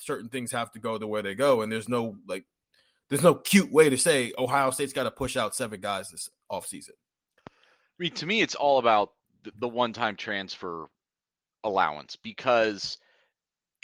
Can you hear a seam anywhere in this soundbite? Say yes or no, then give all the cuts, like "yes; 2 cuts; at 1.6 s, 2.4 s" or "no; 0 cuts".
no; 0 cuts